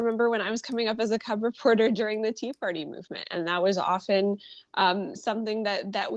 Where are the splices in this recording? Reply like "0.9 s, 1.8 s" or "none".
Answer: none